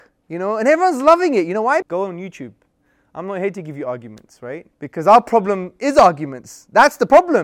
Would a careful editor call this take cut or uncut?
cut